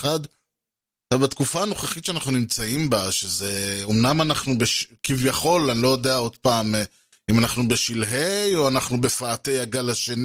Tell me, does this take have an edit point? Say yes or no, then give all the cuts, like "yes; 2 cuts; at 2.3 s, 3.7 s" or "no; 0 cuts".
no; 0 cuts